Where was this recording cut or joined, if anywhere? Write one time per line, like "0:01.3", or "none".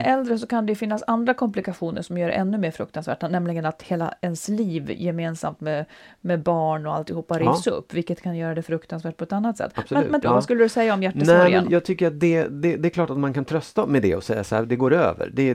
0:10.2